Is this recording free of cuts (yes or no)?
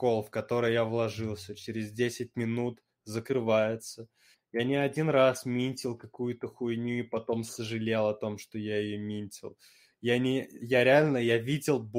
no